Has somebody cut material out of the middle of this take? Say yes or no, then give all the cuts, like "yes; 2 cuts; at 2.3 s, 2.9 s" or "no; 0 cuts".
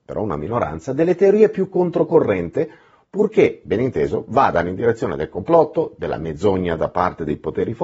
no; 0 cuts